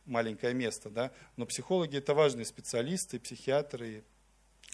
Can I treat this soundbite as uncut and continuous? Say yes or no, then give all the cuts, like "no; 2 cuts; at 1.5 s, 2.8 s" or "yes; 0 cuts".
yes; 0 cuts